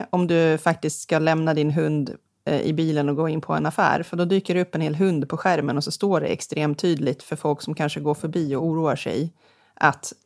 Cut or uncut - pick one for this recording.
uncut